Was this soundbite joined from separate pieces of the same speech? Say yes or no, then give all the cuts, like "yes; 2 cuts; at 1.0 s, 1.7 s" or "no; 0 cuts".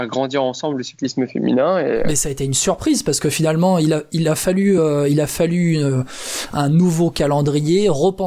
no; 0 cuts